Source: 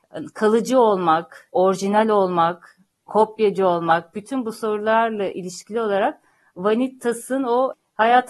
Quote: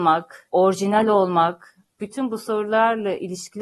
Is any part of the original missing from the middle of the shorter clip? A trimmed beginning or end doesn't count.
yes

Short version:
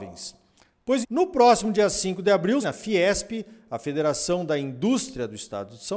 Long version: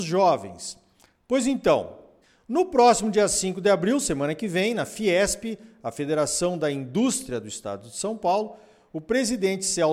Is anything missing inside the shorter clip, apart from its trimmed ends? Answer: yes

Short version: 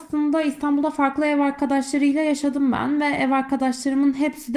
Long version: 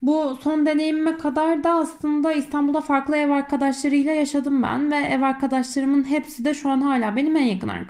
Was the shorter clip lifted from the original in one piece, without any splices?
yes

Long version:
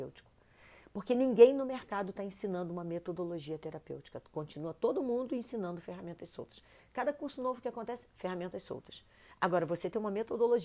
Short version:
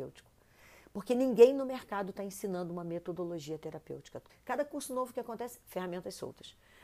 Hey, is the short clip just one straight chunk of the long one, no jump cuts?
no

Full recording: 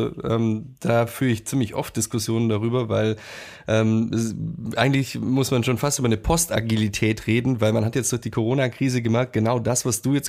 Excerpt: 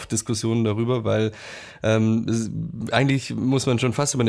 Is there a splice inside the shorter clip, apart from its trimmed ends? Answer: no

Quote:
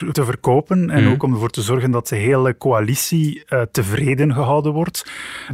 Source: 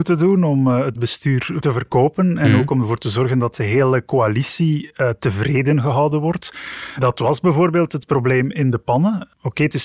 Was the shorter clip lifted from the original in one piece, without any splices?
yes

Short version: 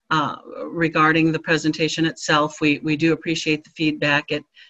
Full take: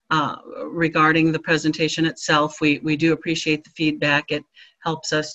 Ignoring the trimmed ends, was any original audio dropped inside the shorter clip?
no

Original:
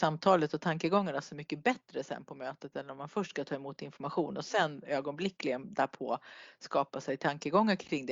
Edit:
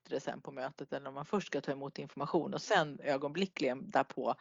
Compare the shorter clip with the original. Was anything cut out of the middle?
no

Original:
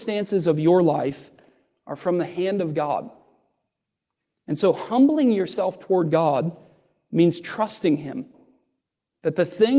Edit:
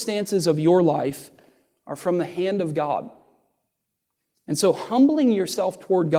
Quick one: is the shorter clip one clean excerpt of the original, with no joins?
yes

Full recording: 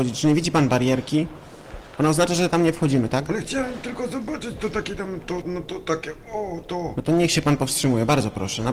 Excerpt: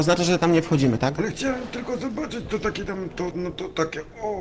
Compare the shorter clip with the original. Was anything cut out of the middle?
no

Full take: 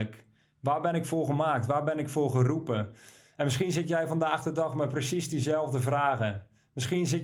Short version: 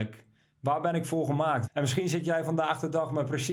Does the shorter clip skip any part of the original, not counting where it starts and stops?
yes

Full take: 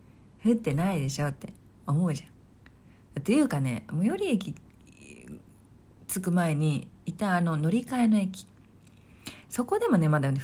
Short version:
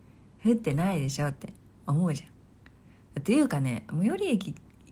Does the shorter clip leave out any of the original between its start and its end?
no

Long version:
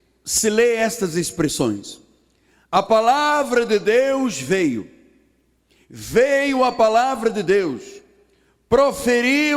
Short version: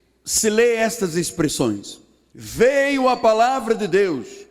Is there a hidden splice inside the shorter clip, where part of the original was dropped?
yes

